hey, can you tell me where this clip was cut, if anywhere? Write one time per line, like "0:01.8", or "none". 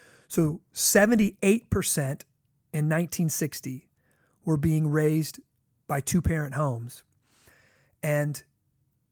none